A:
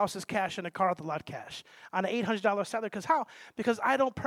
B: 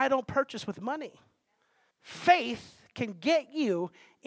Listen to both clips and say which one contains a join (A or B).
B